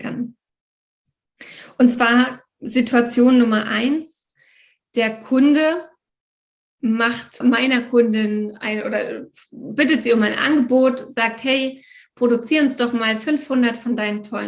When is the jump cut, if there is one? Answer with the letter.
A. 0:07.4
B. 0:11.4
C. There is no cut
A